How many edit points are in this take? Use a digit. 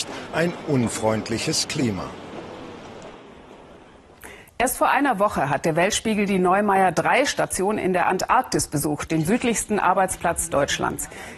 0